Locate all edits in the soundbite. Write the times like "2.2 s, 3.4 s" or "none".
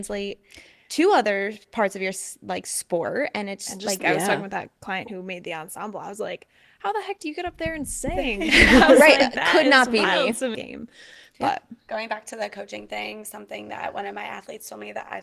4.0 s, 10.5 s